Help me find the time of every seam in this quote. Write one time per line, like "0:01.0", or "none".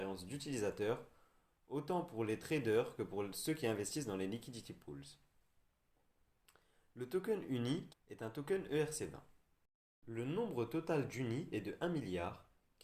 0:07.9